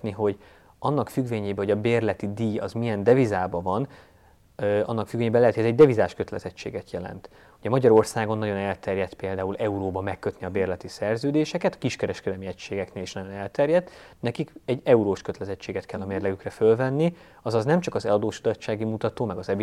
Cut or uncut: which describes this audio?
uncut